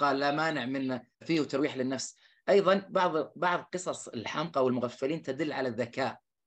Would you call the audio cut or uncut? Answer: cut